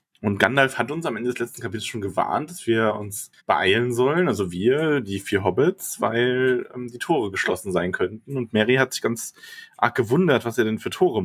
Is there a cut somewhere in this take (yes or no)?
yes